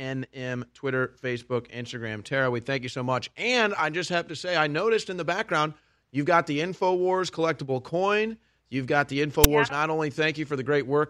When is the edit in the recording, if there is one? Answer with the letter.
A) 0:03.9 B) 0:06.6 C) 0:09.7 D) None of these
C